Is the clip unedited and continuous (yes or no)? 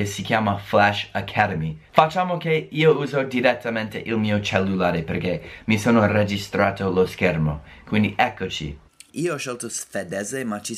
no